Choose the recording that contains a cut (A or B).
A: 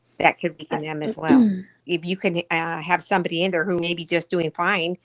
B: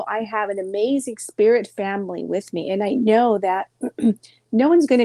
A